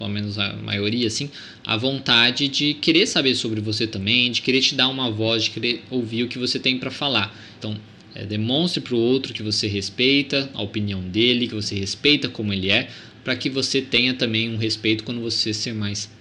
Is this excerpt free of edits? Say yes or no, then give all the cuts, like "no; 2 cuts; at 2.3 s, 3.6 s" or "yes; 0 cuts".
no; 1 cut; at 7.6 s